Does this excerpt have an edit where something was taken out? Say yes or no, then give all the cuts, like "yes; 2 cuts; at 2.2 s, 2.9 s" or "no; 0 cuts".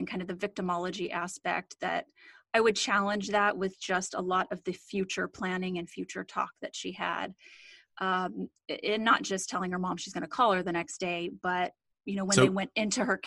no; 0 cuts